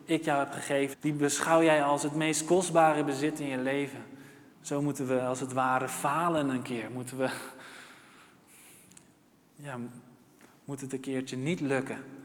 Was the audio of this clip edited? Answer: yes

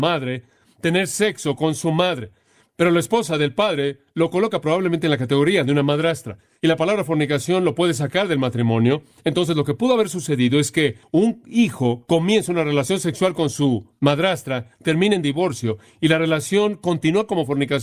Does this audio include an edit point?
no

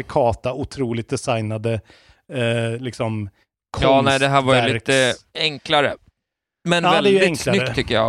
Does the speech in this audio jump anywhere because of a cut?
no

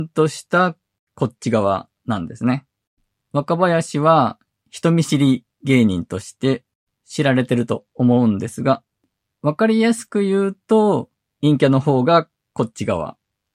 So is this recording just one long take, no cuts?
no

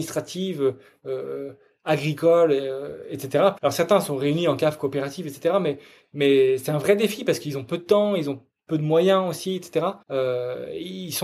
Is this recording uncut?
no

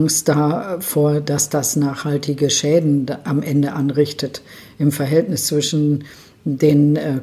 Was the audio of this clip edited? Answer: no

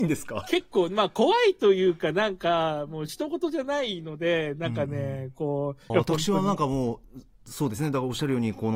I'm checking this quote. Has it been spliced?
yes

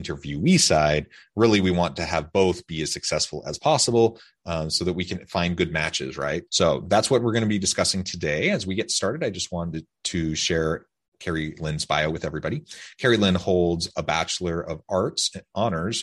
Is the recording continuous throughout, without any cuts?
no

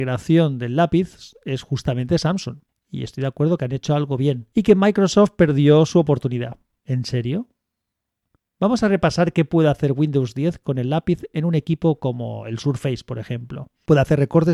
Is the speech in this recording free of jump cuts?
no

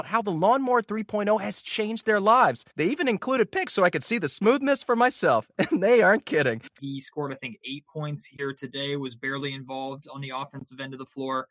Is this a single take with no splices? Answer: no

